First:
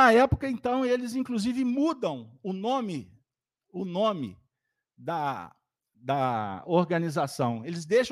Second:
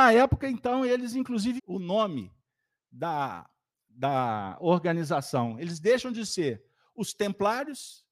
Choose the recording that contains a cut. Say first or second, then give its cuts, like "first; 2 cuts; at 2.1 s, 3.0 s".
second; 1 cut; at 1.6 s